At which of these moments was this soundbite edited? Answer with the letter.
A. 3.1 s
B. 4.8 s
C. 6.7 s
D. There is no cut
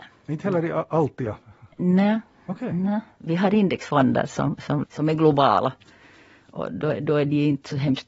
B